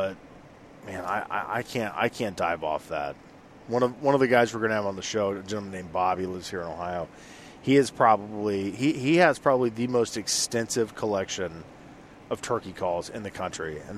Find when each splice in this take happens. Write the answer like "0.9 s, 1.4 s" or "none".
none